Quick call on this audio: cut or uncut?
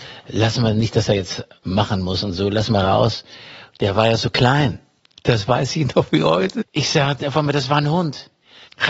cut